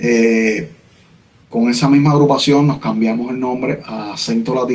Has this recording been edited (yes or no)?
no